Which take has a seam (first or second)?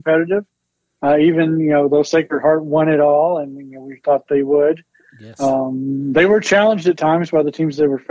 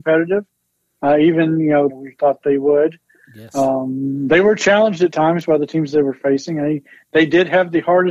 second